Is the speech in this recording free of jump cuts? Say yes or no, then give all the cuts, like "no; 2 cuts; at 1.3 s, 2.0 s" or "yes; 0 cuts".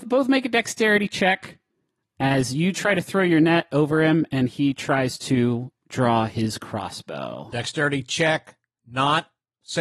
yes; 0 cuts